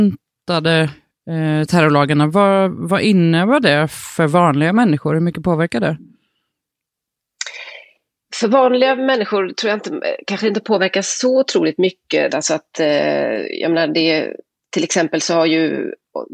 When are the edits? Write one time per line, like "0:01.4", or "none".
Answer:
0:12.3

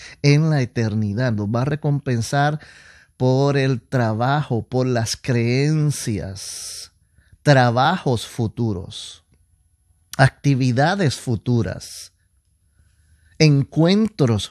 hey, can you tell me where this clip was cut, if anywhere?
0:07.3

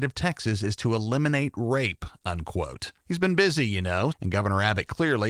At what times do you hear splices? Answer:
0:03.0
0:04.1

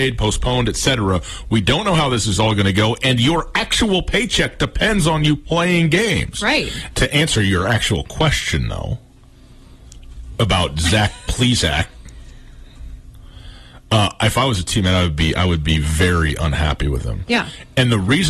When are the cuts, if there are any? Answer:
0:06.9

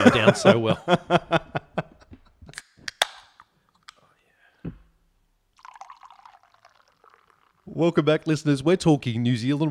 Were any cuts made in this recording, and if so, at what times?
none

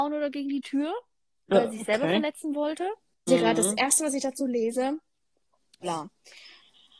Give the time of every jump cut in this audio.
0:03.3
0:05.8

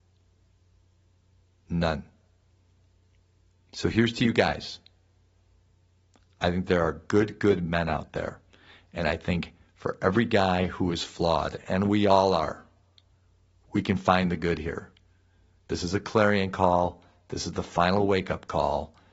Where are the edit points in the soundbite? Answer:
none

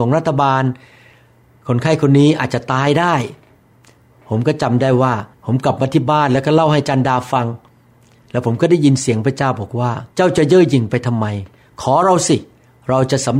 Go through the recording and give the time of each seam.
0:05.3
0:10.1

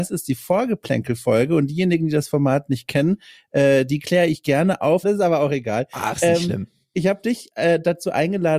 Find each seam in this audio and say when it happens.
0:05.0

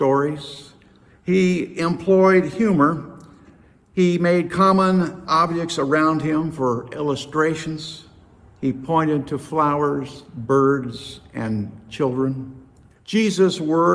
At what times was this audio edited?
0:13.0

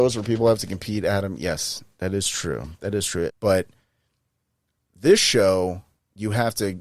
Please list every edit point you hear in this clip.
0:03.3

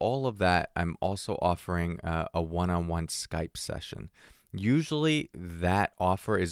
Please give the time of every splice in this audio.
none

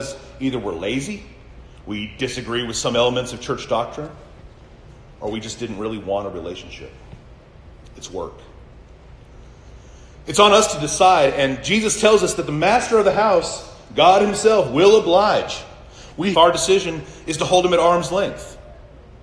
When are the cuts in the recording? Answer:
0:16.3

